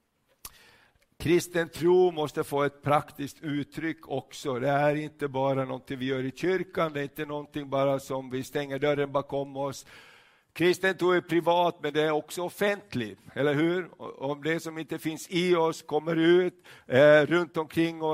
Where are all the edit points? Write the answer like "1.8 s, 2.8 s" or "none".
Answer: none